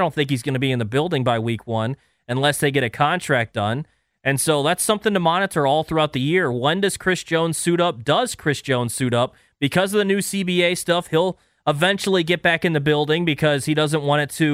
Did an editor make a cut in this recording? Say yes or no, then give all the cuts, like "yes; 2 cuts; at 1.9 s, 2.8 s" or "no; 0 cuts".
no; 0 cuts